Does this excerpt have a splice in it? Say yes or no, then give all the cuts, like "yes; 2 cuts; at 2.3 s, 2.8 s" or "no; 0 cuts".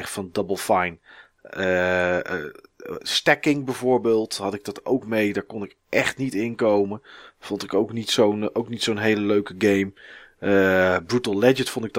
no; 0 cuts